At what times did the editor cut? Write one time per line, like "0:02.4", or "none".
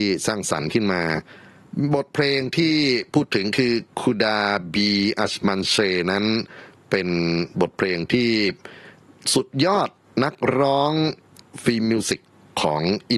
none